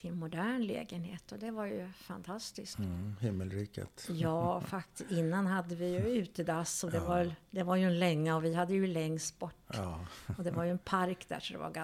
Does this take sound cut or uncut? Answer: uncut